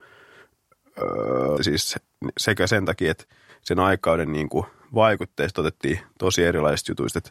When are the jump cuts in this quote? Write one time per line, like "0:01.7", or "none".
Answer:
0:01.6